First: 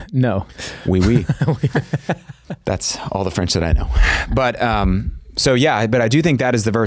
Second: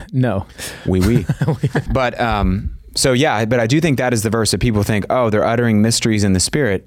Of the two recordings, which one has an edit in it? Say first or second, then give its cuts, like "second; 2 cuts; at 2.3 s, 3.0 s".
second; 1 cut; at 1.9 s